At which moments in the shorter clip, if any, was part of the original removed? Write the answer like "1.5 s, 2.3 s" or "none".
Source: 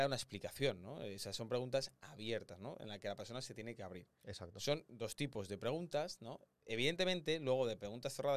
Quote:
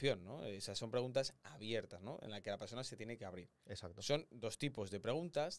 none